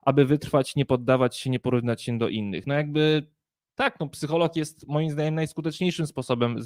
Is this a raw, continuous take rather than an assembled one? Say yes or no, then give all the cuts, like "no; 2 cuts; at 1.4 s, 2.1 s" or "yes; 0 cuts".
yes; 0 cuts